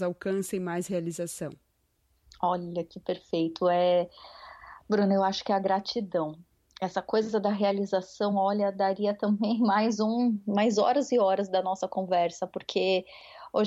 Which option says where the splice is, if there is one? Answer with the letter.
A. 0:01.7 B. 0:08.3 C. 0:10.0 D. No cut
D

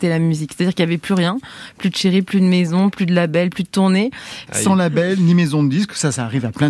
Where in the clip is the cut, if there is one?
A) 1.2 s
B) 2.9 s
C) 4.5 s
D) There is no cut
C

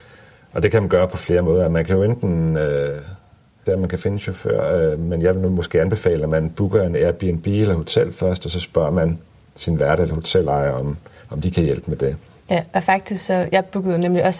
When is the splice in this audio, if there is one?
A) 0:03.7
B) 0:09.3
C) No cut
A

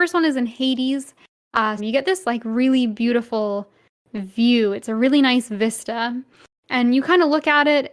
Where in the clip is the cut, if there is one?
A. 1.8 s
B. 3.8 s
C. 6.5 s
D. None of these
A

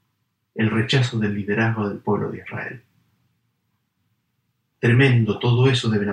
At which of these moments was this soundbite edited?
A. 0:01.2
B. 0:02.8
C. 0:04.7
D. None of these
C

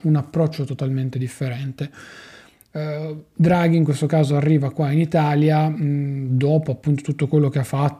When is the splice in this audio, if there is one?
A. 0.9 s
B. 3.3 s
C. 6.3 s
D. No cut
D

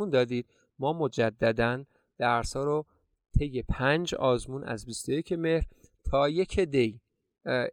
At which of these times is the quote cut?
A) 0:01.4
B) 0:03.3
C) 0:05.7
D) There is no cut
D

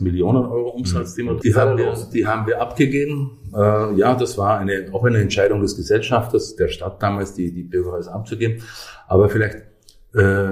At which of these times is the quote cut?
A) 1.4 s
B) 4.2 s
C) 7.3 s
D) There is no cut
A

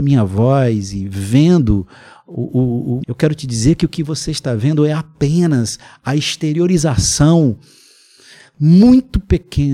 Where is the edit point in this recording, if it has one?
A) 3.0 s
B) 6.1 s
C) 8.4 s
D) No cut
A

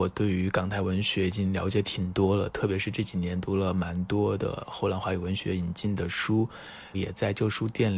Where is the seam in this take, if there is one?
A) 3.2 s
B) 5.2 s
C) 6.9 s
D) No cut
C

